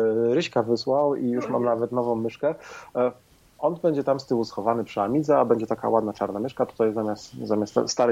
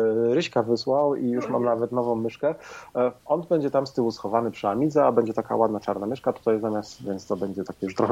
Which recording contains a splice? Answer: second; 2 cuts; at 3.2 s, 7.0 s

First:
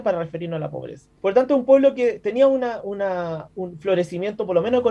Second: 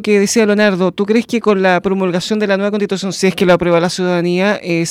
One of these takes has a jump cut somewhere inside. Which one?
first; 2 cuts; at 1.2 s, 2.8 s

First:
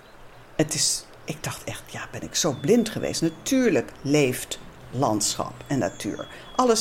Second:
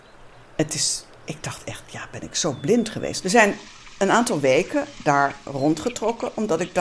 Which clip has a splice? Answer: second; 1 cut; at 3.2 s

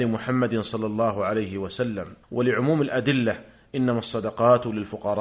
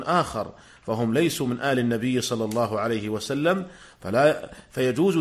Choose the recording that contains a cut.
first; 1 cut; at 2.2 s

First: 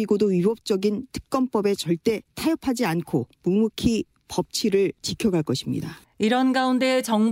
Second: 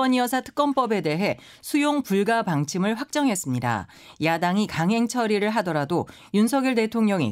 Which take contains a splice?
first; 1 cut; at 6.0 s

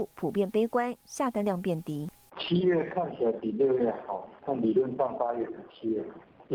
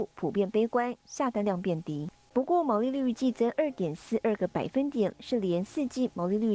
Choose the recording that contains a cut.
second; 2 cuts; at 2.3 s, 5.1 s

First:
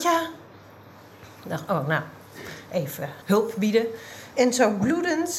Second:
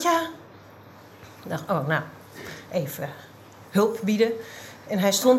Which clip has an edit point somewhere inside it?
first; 2 cuts; at 3.2 s, 4.3 s

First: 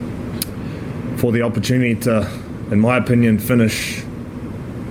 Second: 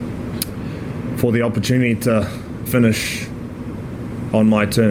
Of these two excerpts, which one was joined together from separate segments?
second; 1 cut; at 2.7 s

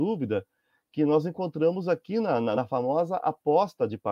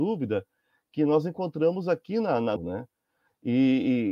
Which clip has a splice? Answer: second; 1 cut; at 2.6 s

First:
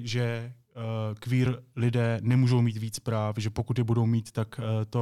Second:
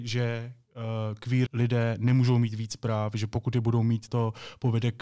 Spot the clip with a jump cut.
second; 2 cuts; at 1.5 s, 4.1 s

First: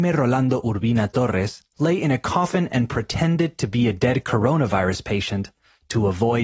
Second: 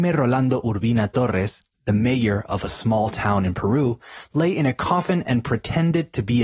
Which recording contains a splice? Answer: first; 1 cut; at 1.7 s

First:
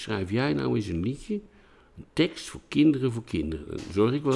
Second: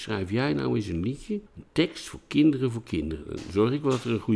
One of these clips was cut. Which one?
second; 1 cut; at 1.5 s

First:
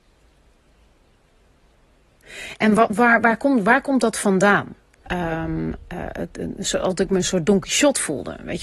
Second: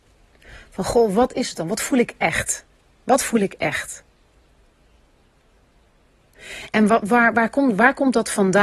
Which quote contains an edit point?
first; 1 cut; at 5.1 s

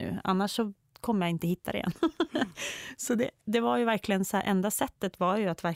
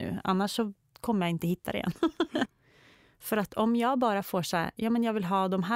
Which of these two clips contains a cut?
second; 1 cut; at 2.4 s

